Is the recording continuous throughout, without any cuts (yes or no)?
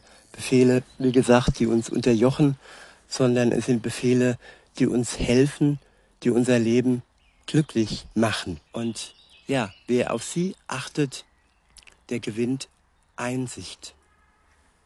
no